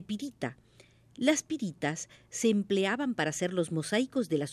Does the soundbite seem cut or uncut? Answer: uncut